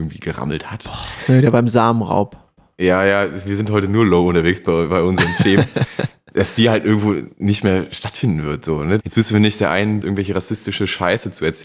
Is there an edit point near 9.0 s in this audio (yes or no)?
yes